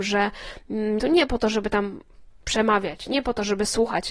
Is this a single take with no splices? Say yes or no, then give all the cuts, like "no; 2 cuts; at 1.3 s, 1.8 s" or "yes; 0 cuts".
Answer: no; 1 cut; at 1.0 s